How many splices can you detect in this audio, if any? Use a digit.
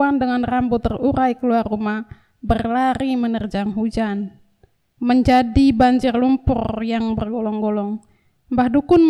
1